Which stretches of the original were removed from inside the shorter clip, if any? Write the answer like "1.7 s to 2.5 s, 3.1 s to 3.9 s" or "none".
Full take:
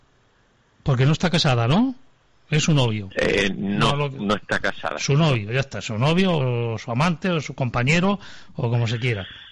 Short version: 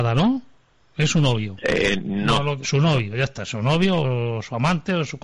4.2 s to 5.0 s